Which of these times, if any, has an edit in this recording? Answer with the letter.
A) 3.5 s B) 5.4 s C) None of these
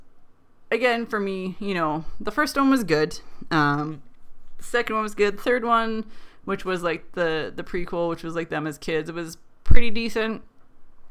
C